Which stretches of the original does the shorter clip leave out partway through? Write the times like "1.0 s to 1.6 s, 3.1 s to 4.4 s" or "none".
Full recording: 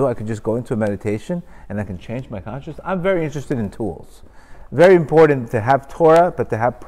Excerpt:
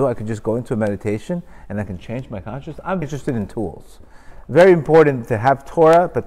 3.0 s to 3.2 s